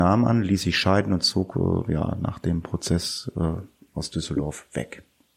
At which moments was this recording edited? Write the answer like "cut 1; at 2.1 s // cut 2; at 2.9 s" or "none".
none